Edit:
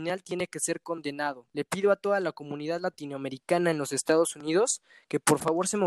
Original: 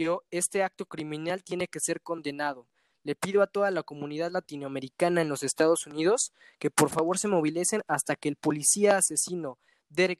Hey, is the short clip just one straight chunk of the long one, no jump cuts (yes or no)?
no